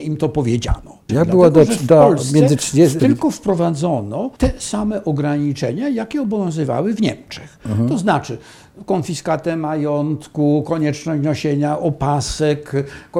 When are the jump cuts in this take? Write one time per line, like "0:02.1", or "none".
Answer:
0:01.1
0:03.0
0:04.4

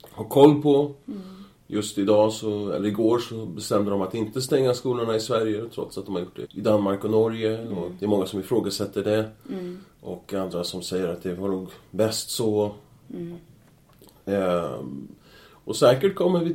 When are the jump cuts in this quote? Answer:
0:06.4

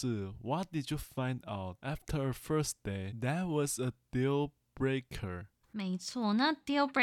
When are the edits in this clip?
0:05.6

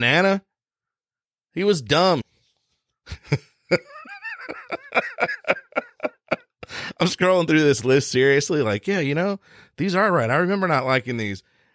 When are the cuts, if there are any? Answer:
0:02.2

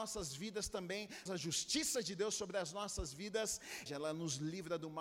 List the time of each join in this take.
0:01.3
0:03.9

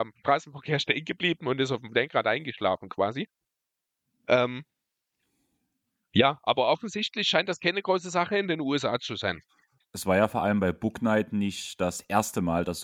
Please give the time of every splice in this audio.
0:09.8

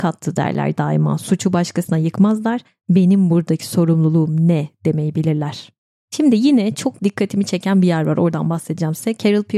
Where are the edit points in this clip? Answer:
none

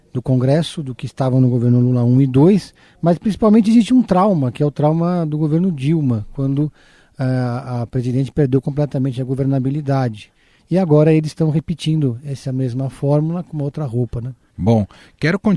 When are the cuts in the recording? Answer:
0:10.6

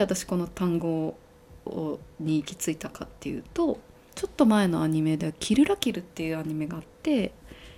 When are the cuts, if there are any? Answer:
0:04.1

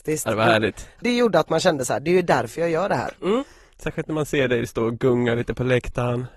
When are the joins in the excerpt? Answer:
0:01.0
0:03.2

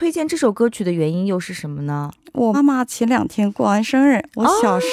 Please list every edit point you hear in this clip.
0:02.5

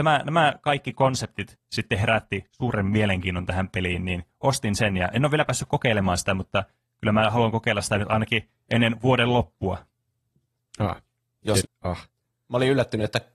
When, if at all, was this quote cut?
0:11.6

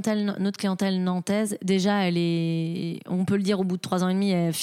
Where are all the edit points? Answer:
none

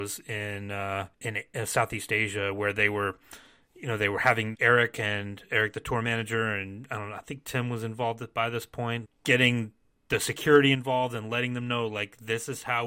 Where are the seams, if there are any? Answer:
0:01.1
0:04.5
0:09.0

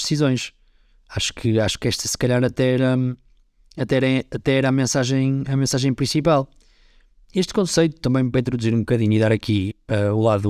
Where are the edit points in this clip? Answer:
none

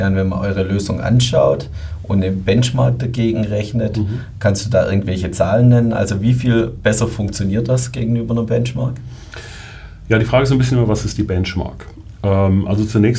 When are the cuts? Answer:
none

